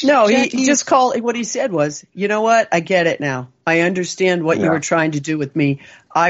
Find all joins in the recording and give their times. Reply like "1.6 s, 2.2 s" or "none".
none